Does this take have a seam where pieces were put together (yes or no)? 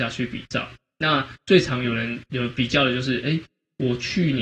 no